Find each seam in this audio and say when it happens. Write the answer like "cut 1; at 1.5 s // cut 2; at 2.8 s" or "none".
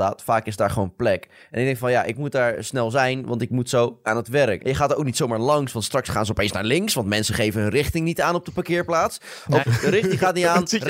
cut 1; at 4.6 s // cut 2; at 9.6 s